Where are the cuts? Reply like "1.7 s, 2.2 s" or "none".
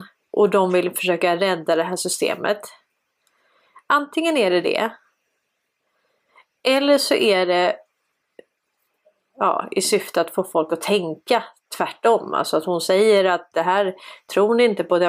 none